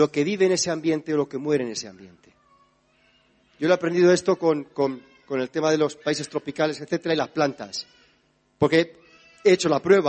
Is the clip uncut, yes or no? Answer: yes